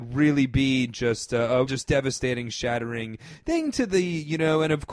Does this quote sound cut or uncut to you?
cut